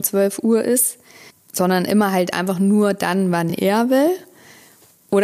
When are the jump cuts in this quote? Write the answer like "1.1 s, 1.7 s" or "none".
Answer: none